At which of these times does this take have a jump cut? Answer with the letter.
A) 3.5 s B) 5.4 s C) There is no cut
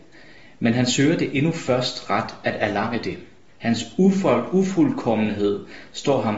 A